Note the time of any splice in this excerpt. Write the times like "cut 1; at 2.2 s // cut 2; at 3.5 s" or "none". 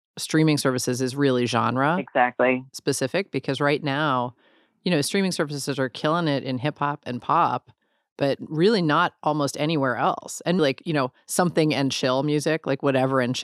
cut 1; at 10.6 s